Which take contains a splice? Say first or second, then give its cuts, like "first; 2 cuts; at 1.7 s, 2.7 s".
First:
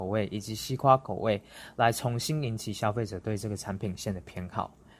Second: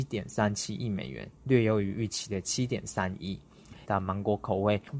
second; 1 cut; at 3.8 s